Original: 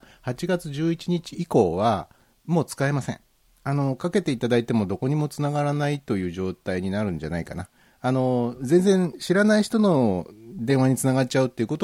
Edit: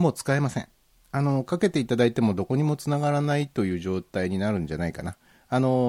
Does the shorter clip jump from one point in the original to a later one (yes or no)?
no